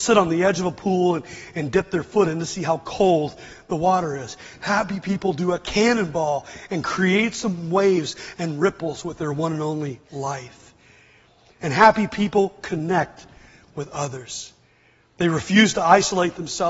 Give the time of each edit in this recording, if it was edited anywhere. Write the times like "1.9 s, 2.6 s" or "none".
none